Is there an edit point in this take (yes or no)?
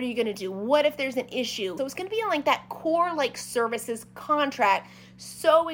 yes